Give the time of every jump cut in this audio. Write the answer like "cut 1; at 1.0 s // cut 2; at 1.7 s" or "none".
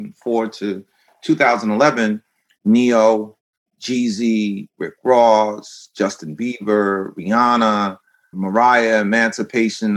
cut 1; at 8.3 s